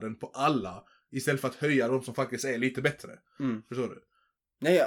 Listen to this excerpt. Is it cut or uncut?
uncut